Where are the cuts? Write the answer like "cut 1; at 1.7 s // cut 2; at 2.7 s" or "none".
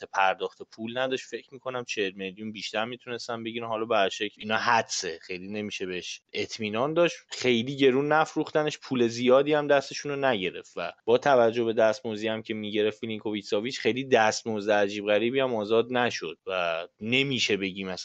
none